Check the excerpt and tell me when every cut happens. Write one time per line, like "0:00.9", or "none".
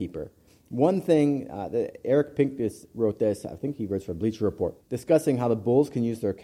0:04.8